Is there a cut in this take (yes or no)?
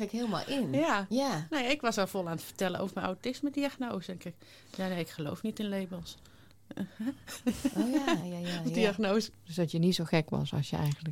yes